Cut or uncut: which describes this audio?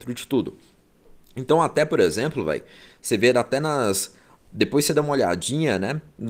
uncut